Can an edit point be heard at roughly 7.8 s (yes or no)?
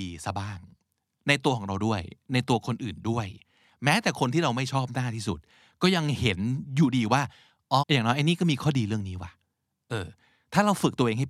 yes